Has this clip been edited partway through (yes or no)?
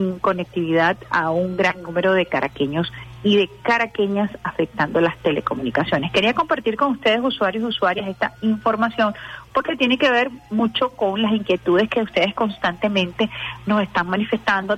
no